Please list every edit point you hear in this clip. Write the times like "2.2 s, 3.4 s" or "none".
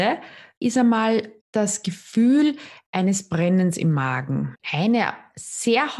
1.4 s, 4.5 s

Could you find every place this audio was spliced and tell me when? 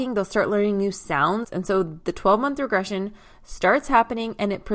1.4 s

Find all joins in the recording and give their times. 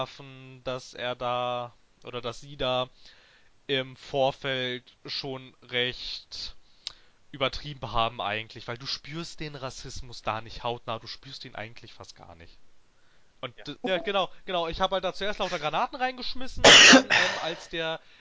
13.8 s

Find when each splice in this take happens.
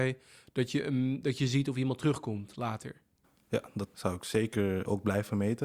3.9 s

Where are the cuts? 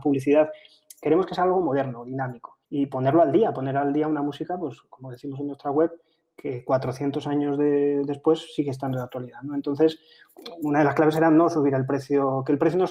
2.6 s

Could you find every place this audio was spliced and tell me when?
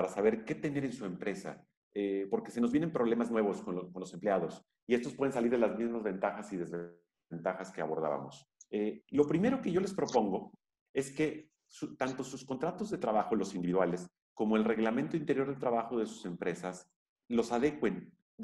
none

